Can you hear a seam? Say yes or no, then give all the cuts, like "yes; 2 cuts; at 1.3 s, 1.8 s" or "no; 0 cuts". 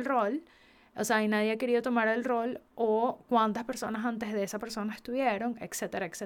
no; 0 cuts